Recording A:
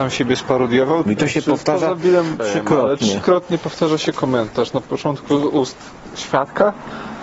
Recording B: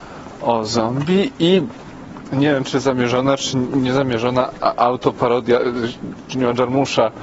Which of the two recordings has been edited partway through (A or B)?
A